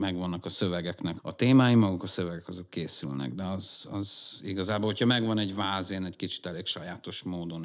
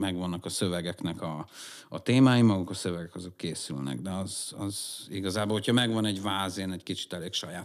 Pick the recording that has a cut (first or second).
first